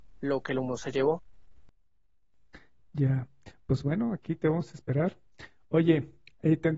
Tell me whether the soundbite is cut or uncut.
uncut